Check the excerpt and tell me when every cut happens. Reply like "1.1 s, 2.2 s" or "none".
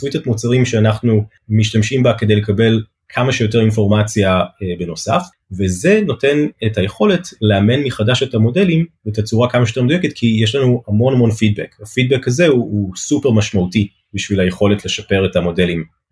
none